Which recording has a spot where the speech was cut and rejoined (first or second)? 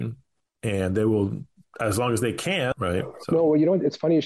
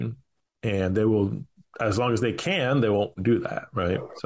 first